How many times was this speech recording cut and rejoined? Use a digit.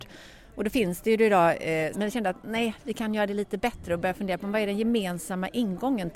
1